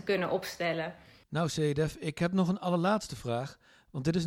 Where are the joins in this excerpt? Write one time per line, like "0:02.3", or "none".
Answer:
none

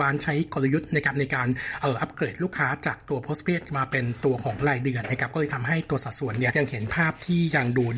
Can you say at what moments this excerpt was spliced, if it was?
0:06.5

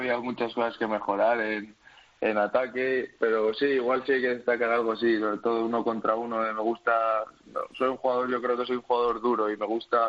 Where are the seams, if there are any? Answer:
none

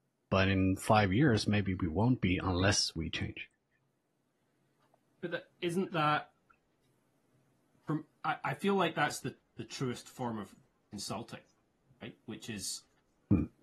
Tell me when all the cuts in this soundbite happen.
none

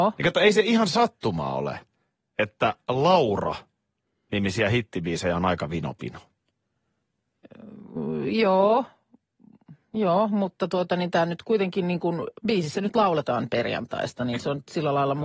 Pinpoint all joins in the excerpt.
0:12.4

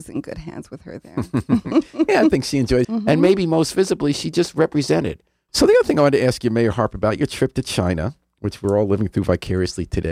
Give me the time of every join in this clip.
0:02.8
0:05.5

